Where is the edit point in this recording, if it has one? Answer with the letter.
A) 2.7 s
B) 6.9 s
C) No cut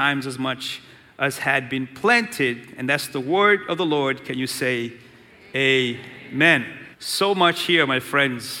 B